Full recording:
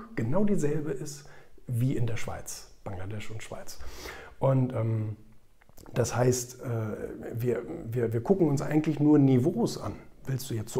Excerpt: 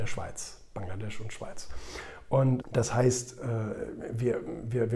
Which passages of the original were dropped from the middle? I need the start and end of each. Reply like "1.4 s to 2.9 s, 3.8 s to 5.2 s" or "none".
4.7 s to 5.8 s